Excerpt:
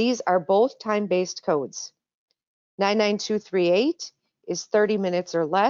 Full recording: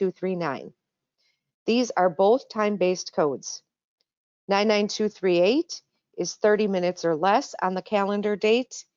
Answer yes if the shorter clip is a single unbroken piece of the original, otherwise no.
yes